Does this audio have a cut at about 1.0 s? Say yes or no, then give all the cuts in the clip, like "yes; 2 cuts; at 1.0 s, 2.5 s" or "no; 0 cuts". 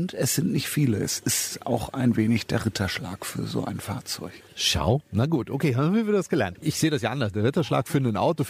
no; 0 cuts